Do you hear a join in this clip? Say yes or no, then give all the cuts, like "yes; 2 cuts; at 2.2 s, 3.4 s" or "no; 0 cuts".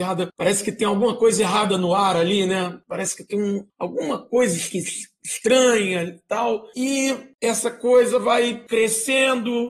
no; 0 cuts